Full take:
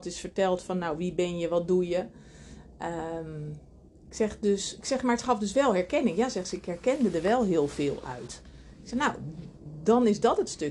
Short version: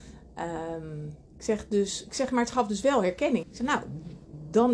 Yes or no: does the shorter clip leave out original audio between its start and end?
yes